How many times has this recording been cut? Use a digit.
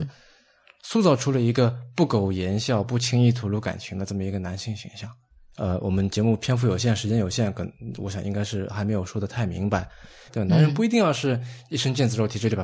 2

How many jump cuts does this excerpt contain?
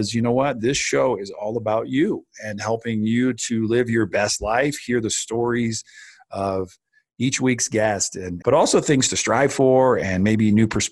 1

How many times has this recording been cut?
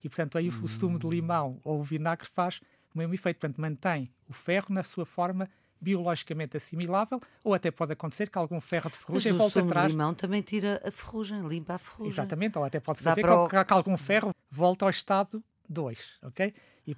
1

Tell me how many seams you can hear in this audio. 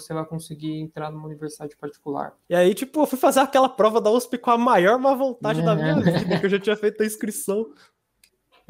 1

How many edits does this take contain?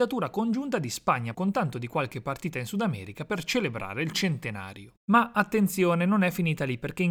1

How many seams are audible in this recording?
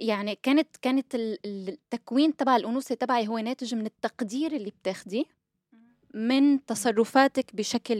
0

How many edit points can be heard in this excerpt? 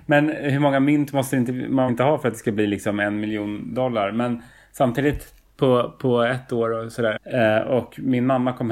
2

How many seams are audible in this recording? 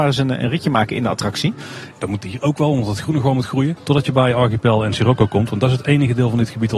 2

